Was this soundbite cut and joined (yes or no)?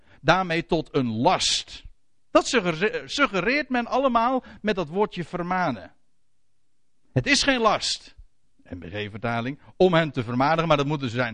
yes